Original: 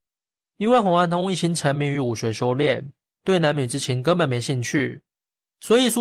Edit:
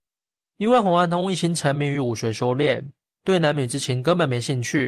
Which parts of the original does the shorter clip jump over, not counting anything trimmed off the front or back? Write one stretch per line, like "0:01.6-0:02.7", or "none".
none